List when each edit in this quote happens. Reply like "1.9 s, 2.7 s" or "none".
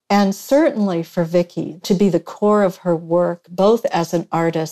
1.8 s